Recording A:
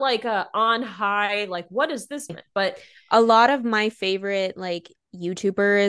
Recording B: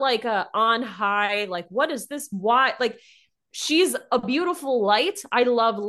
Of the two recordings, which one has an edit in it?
A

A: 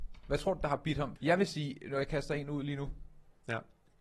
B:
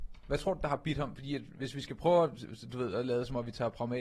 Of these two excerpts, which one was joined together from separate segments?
A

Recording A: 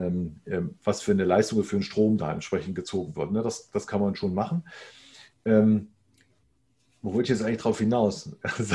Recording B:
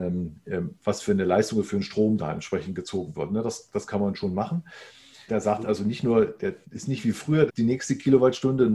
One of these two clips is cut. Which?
B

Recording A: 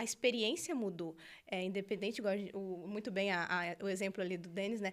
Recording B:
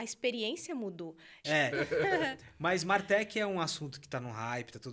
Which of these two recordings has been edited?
B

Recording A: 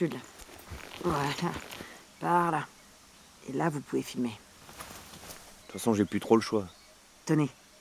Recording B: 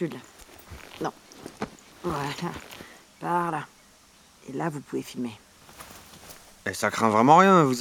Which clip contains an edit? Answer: A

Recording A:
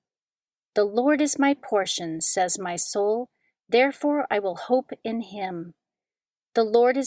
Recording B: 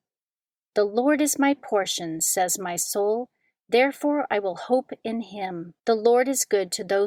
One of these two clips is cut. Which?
B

